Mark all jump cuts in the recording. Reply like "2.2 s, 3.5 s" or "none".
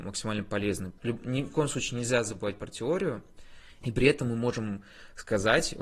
1.0 s, 3.8 s